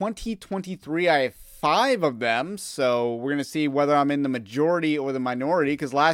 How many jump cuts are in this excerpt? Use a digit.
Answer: 0